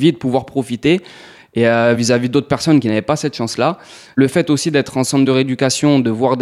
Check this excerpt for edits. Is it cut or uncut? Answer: uncut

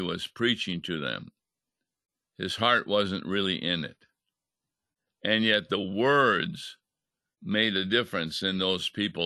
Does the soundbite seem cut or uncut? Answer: uncut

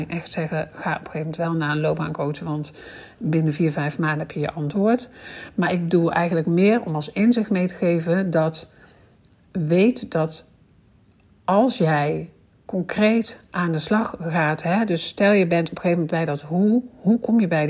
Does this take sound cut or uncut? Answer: uncut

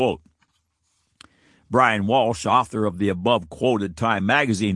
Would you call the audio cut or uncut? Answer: uncut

